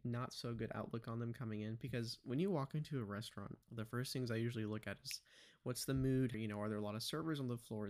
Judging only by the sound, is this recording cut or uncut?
cut